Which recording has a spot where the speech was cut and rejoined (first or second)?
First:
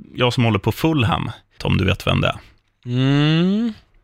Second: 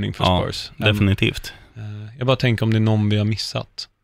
first